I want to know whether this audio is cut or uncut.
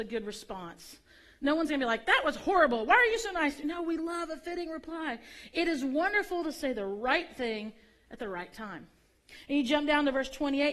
uncut